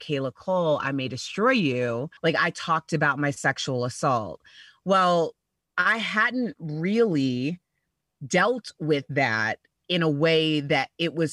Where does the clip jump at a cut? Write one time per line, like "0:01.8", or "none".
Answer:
0:02.2